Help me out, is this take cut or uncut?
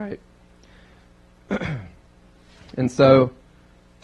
uncut